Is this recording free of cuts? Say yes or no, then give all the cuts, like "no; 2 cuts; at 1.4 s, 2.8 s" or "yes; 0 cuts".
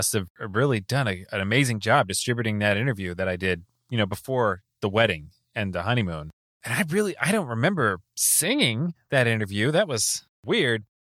yes; 0 cuts